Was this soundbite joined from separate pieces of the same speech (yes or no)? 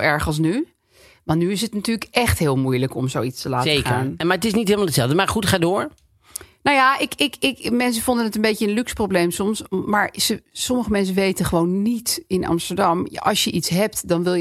no